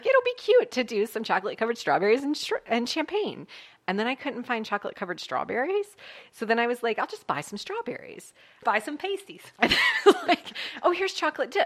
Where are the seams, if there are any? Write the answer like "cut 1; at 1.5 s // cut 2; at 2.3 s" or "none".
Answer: cut 1; at 8.6 s

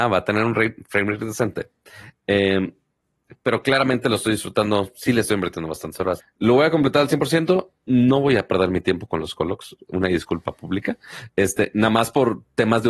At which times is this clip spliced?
cut 1; at 6.2 s

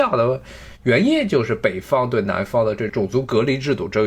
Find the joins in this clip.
cut 1; at 2.9 s

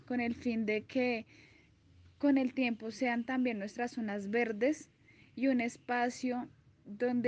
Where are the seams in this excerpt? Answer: none

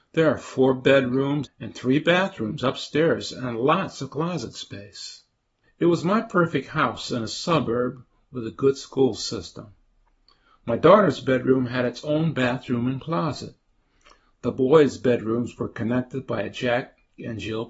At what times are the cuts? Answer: cut 1; at 1.5 s // cut 2; at 5.6 s

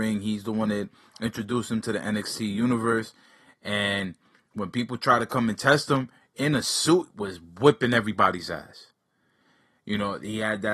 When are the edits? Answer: none

